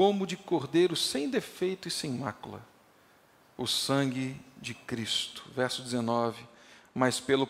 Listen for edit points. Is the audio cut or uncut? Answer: uncut